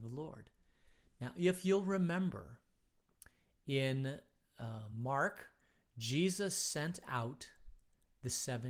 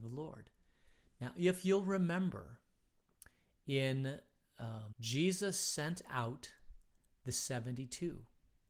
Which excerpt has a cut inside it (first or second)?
second